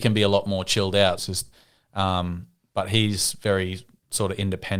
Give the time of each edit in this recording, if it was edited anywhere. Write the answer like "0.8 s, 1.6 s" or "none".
1.2 s